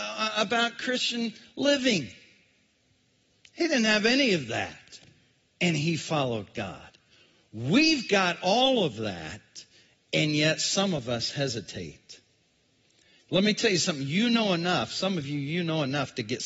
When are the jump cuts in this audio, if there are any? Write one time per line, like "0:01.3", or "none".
none